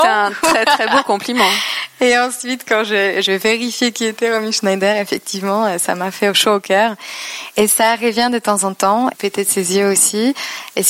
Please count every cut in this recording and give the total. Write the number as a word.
one